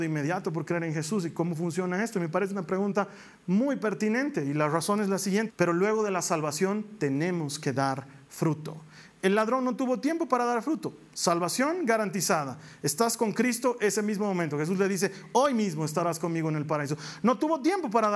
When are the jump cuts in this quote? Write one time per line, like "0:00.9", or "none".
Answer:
0:05.5